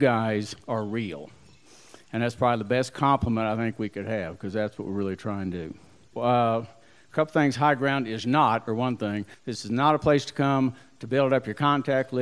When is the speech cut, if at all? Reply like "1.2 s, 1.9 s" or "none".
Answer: 6.1 s, 9.3 s